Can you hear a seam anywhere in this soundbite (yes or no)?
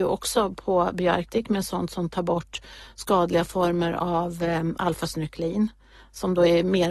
no